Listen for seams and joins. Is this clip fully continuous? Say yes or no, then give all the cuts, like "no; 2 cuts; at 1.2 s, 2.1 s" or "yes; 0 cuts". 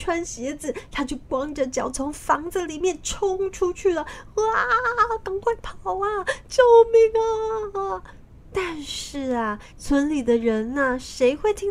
no; 2 cuts; at 6.4 s, 9.7 s